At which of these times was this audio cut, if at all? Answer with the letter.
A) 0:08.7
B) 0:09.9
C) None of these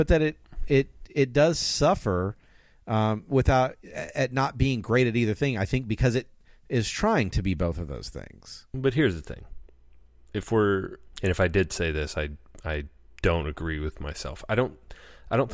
C